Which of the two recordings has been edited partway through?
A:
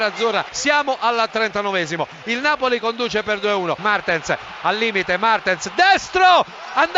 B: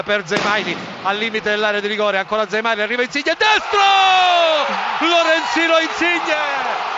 A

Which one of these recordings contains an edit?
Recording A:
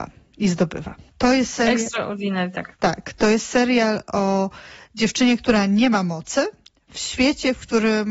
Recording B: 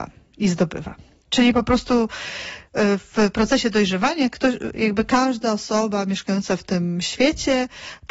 A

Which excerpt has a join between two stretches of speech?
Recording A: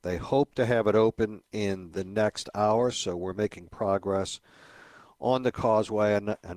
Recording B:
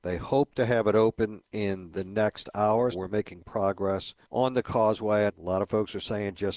B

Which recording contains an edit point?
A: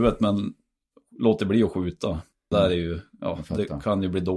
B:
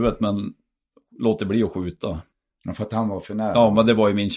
A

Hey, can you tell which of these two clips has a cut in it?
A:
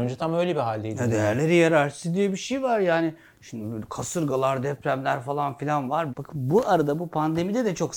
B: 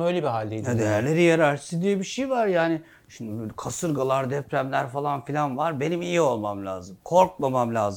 A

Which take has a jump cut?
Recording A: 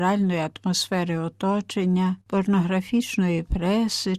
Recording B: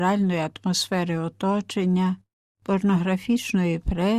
A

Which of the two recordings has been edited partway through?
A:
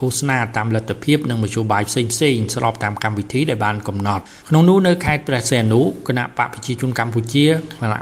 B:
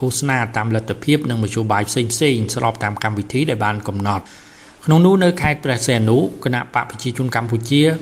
A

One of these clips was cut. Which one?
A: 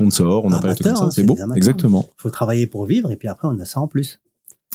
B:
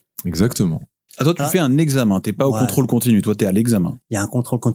B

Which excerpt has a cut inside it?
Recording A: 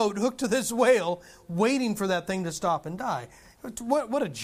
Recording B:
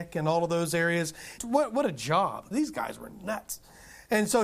B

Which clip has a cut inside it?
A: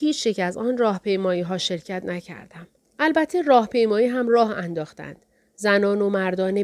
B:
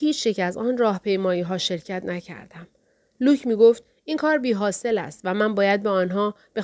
A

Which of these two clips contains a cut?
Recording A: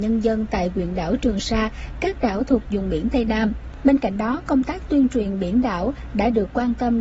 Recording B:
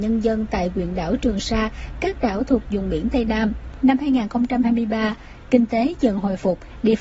B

